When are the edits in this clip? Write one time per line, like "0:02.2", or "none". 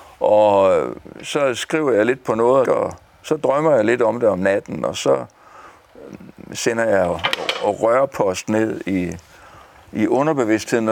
0:02.6